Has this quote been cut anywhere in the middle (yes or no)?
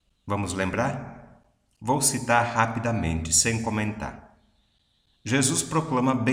no